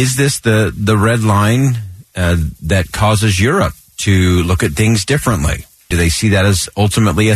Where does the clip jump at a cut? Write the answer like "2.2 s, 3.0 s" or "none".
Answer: 5.9 s